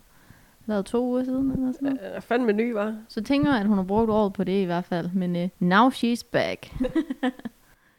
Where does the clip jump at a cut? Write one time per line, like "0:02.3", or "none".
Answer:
0:03.1
0:05.5

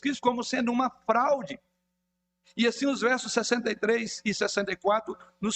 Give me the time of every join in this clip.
0:02.4

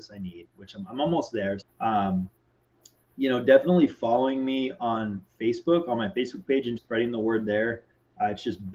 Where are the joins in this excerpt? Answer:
0:01.6
0:06.8

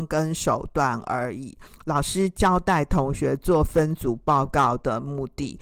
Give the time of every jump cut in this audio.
0:01.7

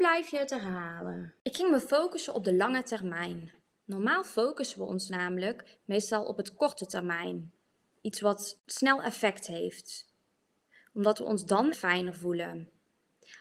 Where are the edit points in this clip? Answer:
0:11.7

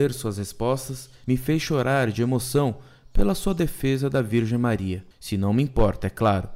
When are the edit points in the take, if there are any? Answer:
0:01.2
0:05.1

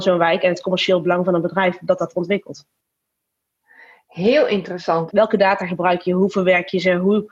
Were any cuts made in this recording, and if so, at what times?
0:05.1

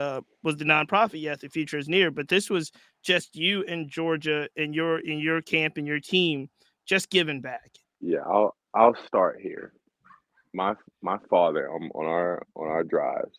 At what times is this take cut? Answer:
0:07.8

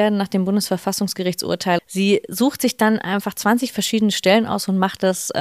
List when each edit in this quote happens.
0:01.8

